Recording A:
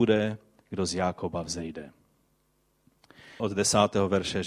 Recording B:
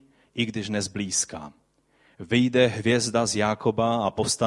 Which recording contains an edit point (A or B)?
A